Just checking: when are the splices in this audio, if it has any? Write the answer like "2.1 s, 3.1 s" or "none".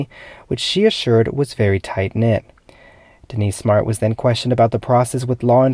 none